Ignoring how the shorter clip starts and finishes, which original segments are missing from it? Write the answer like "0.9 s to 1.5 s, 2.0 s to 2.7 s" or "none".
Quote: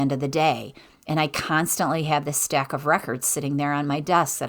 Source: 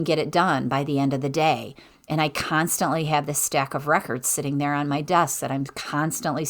none